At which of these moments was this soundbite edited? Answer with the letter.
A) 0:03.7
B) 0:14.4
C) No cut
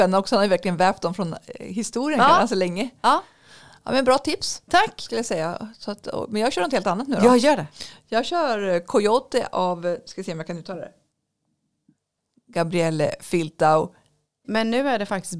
B